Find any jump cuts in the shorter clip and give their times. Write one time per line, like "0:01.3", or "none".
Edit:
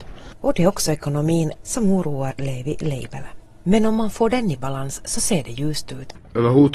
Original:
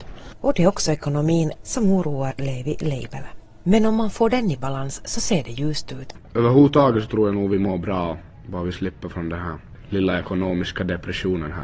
none